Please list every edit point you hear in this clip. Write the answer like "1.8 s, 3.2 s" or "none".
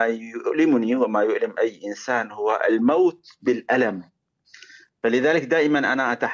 none